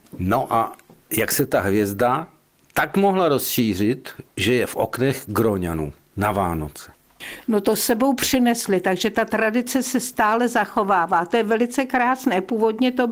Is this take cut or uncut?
uncut